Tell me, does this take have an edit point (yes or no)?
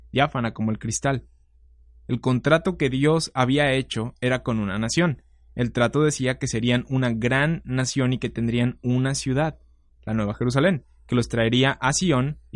no